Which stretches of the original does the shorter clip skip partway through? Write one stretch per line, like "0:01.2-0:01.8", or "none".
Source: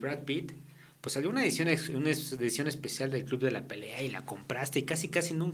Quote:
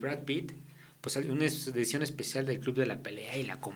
0:01.2-0:01.9

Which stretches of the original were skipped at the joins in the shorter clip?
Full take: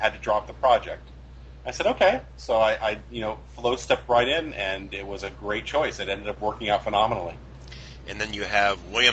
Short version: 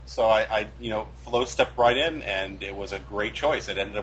none

